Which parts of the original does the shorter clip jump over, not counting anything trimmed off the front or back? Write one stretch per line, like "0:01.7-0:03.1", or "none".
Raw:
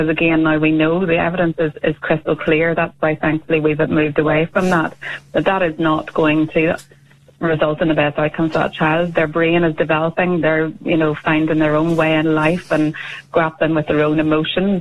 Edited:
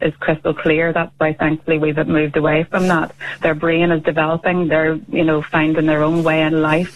0:05.2-0:09.1